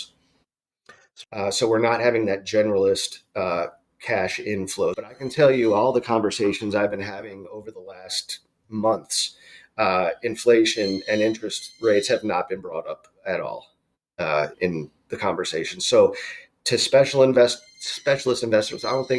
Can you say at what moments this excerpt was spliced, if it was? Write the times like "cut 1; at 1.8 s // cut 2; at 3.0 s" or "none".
cut 1; at 1.2 s // cut 2; at 4.9 s // cut 3; at 14.5 s